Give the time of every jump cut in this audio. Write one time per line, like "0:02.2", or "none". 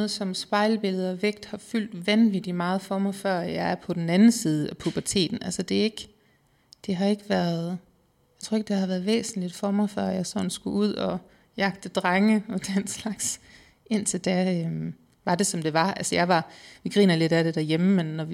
none

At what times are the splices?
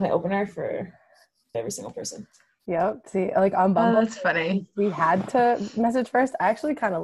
0:01.5

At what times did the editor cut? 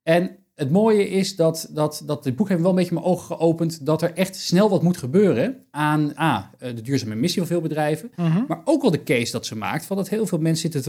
none

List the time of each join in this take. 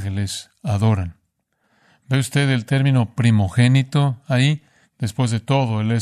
0:04.8

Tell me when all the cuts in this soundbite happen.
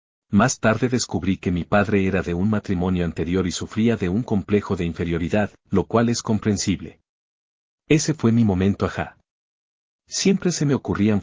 0:05.6

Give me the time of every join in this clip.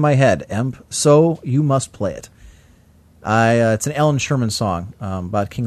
none

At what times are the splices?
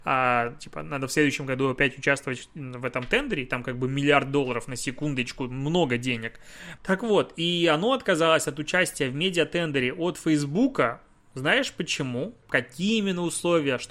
0:06.8
0:12.4

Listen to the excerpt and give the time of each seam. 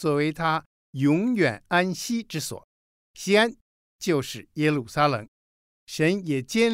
0:05.7

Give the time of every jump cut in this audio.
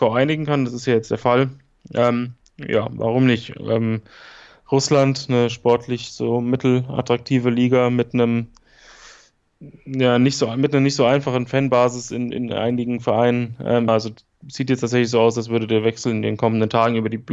0:13.9

